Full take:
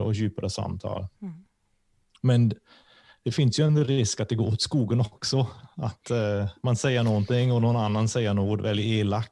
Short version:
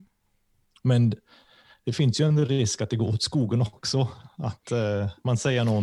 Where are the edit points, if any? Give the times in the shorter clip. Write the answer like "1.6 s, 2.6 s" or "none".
none